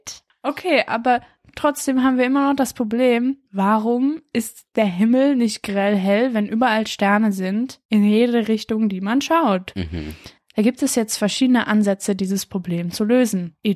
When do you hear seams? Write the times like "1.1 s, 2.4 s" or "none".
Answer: none